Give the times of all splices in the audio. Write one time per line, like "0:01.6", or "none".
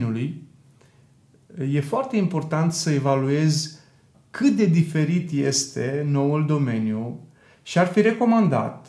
0:04.1